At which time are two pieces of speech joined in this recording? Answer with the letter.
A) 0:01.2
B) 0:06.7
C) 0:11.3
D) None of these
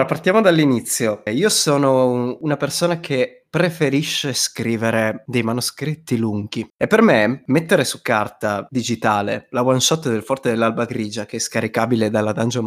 B